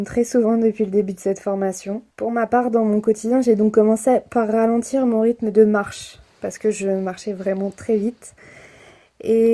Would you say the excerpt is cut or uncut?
cut